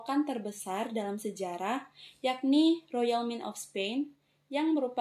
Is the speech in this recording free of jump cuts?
yes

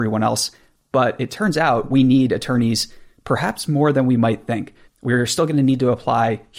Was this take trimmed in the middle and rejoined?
yes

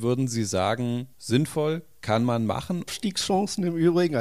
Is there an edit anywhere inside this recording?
yes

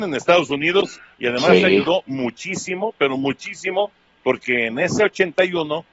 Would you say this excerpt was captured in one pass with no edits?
yes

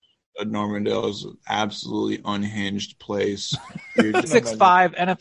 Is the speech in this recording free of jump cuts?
no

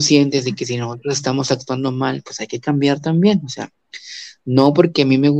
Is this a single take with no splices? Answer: yes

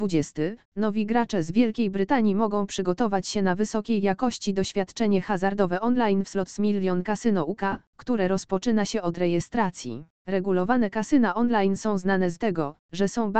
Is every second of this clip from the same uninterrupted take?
no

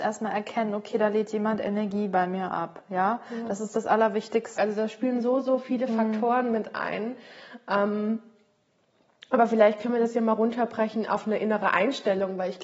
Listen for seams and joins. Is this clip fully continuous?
no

